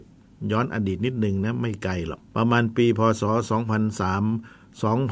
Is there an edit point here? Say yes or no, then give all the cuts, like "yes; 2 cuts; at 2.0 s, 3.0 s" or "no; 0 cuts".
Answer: yes; 1 cut; at 2.3 s